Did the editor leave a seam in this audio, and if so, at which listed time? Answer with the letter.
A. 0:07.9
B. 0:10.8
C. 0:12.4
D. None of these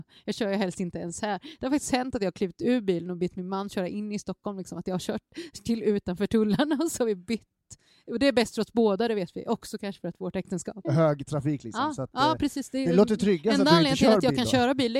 B